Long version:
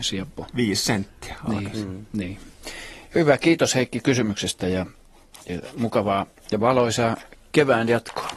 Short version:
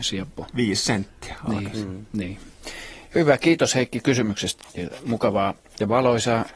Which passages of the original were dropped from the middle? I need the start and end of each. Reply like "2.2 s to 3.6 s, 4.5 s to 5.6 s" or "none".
4.6 s to 5.3 s